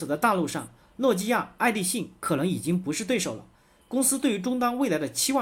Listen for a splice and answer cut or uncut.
uncut